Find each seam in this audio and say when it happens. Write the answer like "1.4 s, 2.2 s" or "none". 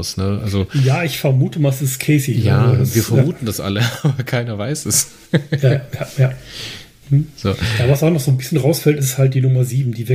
none

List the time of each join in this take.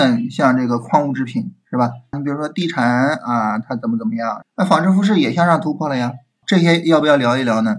2.1 s, 4.4 s, 6.4 s

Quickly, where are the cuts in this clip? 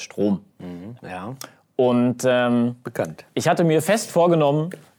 1.0 s

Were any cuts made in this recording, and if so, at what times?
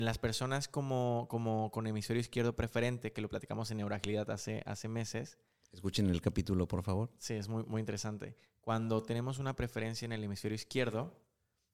none

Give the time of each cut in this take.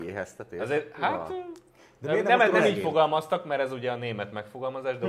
none

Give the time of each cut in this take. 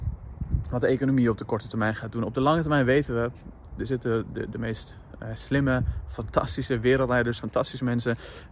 7.4 s

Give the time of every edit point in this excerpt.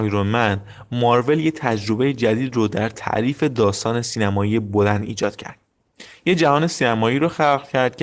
none

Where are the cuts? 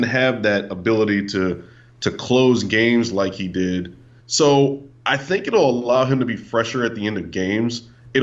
4.2 s

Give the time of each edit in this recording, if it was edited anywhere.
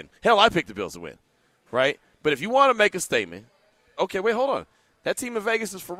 4.0 s

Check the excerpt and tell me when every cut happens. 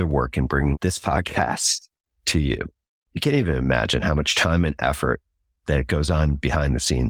none

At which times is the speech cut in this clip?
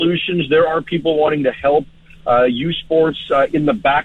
none

